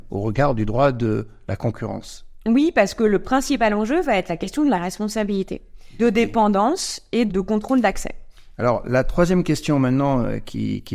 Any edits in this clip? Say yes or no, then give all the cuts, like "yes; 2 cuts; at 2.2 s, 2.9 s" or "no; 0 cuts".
yes; 2 cuts; at 6.0 s, 7.3 s